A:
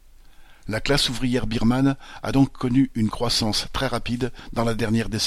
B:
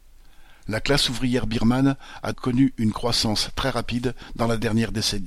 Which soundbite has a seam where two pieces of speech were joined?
B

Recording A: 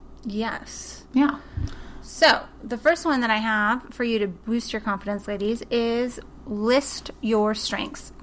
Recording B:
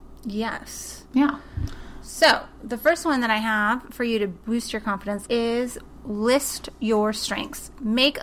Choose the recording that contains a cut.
B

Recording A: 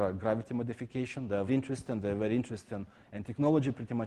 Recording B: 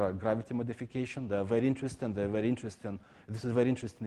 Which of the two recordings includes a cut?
A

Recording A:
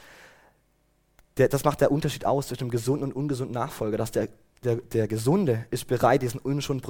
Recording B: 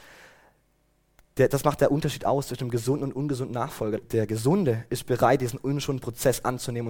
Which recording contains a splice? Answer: B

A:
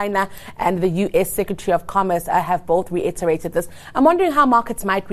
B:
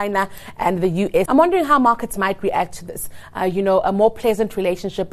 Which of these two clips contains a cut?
B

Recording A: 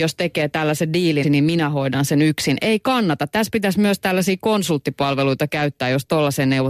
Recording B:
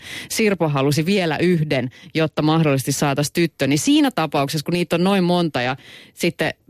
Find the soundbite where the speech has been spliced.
A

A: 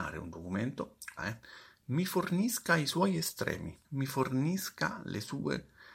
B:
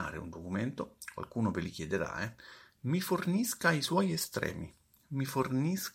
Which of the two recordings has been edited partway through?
A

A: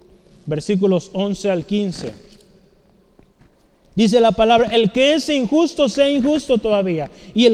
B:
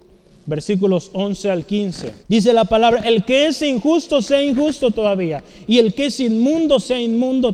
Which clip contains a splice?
B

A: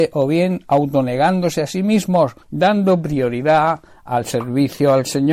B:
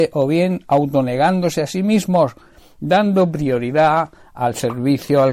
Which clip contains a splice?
A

